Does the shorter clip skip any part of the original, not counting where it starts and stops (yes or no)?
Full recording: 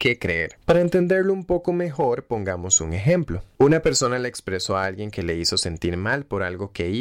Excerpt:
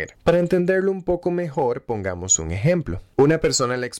no